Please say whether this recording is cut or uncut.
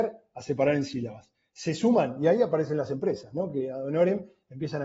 uncut